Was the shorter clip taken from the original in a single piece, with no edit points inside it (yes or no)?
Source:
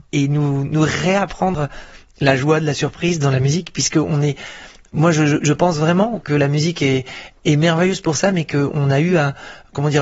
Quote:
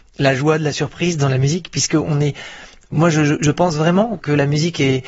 yes